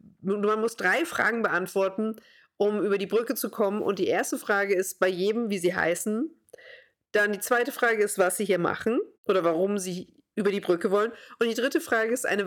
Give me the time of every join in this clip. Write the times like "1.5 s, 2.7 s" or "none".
9.1 s